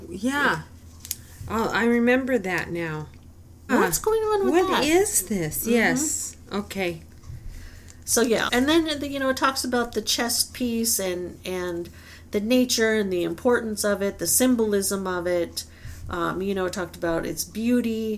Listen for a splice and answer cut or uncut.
cut